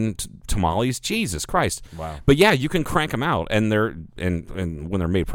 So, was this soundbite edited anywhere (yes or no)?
no